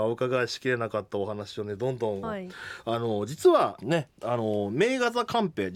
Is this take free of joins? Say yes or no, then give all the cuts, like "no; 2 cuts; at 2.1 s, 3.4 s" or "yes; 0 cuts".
no; 2 cuts; at 2.2 s, 3.8 s